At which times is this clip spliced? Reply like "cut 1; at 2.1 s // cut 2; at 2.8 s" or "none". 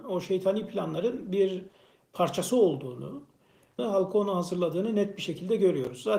cut 1; at 3.8 s